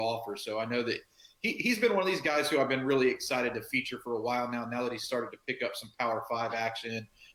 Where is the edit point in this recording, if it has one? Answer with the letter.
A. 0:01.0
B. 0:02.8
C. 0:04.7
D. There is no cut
D